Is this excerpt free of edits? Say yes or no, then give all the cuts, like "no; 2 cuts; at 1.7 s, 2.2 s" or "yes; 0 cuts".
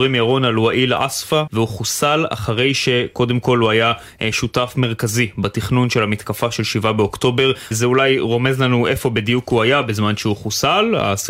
no; 2 cuts; at 1.5 s, 7.7 s